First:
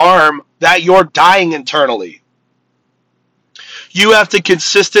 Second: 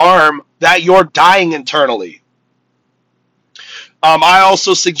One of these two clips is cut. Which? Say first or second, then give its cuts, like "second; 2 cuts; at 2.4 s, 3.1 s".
second; 1 cut; at 3.9 s